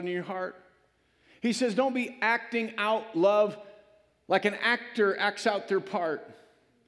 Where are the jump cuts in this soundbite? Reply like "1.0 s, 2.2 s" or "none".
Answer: none